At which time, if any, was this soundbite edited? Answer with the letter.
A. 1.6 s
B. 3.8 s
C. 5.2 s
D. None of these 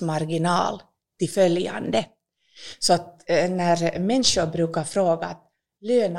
D